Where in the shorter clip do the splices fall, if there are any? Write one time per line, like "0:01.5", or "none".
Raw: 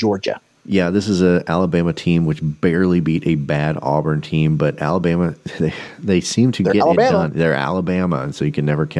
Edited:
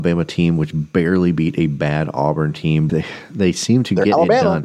0:02.9

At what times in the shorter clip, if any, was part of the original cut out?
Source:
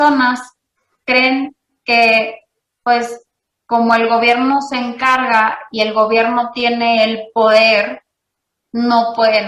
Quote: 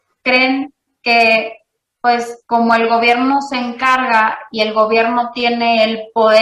0:02.4

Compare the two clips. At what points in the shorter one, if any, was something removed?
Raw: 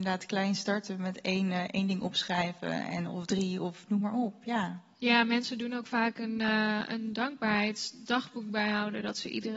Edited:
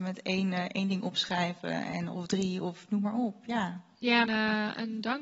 0:04.3

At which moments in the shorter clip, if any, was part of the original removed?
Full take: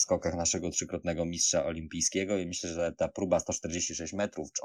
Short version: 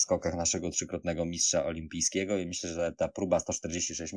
none

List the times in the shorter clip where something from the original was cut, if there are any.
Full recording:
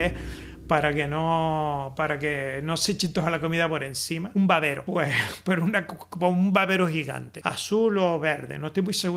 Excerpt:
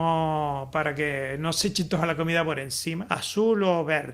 0:03.1

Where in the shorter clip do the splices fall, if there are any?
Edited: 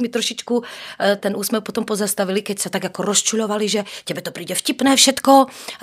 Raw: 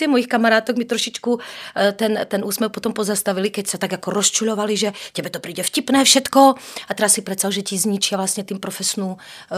0:01.2

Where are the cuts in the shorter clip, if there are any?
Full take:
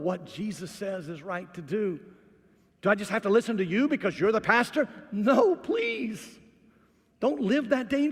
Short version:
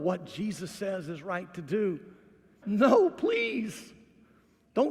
0:02.6

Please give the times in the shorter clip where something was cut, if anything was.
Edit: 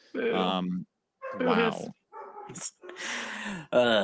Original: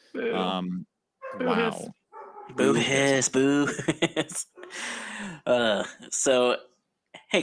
0:02.5

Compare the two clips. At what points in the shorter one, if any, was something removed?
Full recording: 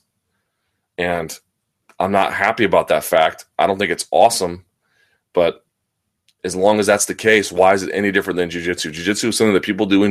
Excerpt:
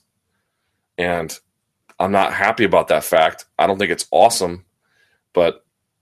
none

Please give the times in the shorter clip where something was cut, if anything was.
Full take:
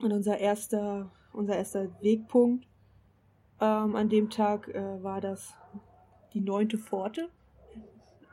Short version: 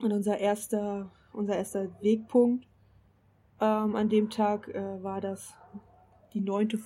none

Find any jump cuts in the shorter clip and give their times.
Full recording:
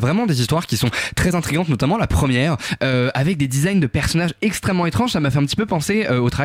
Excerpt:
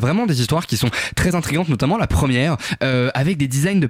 none

